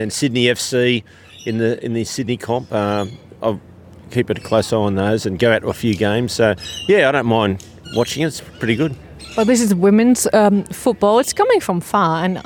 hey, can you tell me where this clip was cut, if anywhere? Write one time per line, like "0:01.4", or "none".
none